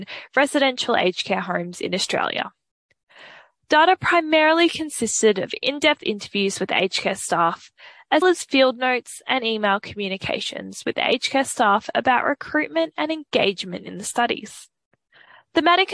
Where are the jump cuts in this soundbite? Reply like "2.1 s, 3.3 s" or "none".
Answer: 8.2 s